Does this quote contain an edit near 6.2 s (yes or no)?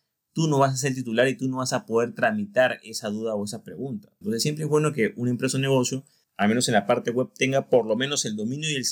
no